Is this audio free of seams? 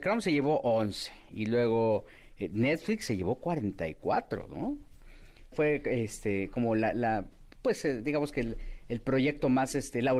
no; 1 cut; at 5.5 s

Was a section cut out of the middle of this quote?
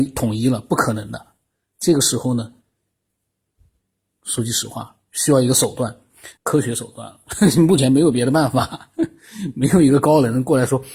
yes; 1 cut; at 6.4 s

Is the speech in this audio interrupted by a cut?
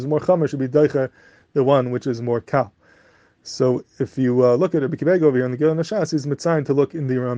no; 0 cuts

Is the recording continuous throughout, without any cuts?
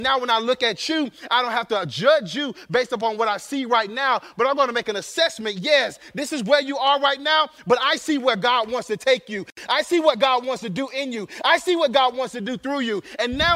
yes; 0 cuts

